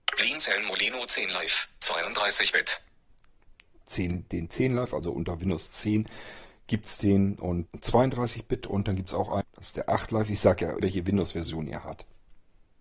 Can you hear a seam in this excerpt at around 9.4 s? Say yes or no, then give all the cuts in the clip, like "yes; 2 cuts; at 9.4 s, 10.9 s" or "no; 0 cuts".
yes; 3 cuts; at 7.7 s, 9.4 s, 10.8 s